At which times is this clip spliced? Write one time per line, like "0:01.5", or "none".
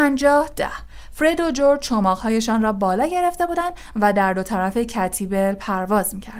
none